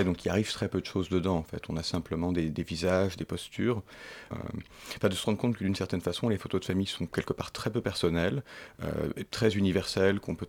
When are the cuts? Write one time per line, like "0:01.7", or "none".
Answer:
0:04.3

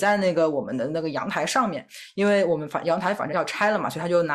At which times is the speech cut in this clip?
0:03.3

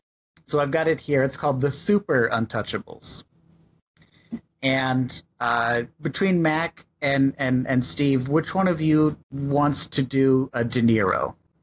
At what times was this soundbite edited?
0:05.9
0:09.2

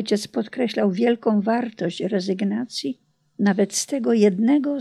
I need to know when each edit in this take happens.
none

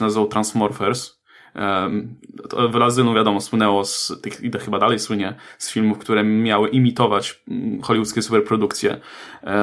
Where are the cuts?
none

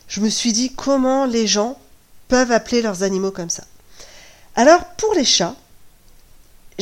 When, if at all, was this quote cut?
none

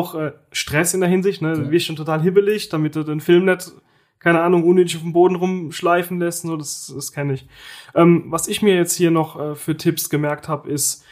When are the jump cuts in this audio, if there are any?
none

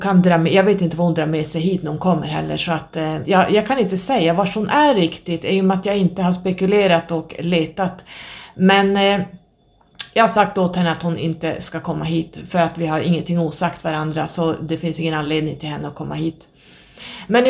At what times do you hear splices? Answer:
0:03.2

